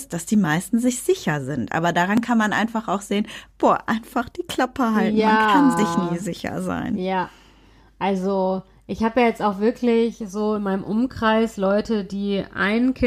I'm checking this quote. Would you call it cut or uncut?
uncut